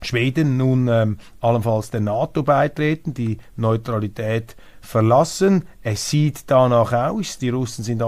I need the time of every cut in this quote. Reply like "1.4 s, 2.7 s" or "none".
none